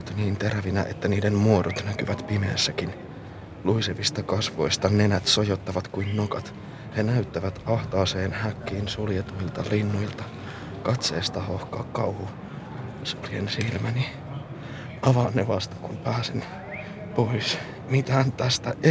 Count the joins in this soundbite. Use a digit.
0